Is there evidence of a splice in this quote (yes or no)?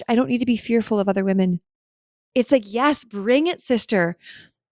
yes